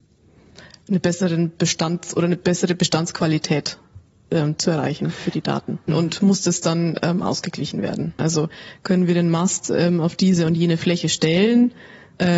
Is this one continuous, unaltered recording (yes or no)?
no